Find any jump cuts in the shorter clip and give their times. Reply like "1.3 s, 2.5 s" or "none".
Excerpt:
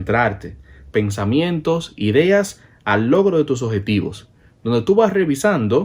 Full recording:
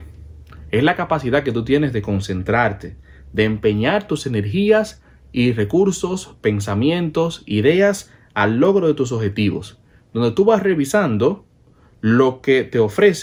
0.9 s